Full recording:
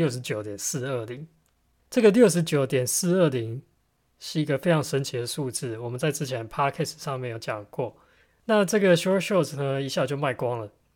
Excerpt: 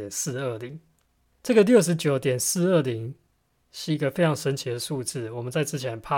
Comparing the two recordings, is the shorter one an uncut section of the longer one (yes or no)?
yes